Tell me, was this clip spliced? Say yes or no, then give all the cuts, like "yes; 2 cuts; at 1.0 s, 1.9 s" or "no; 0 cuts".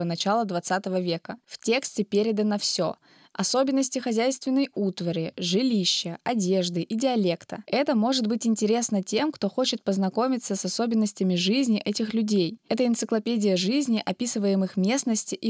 no; 0 cuts